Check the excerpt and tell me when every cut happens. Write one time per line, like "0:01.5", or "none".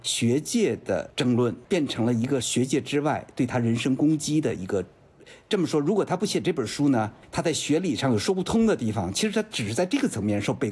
none